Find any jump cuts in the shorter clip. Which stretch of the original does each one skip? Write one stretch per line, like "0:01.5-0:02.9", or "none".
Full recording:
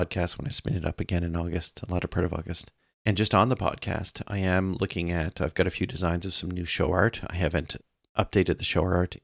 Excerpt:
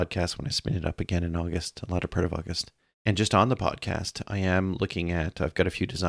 none